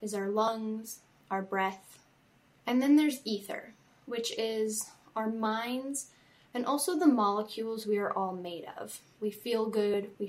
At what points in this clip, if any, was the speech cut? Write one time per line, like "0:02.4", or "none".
0:09.2